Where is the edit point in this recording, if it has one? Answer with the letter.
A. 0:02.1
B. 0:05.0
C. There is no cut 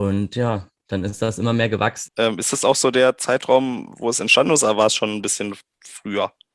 A